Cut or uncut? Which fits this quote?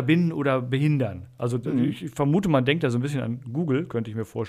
uncut